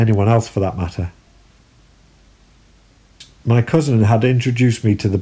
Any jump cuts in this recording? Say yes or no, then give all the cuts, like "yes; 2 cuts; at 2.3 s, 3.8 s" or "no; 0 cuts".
no; 0 cuts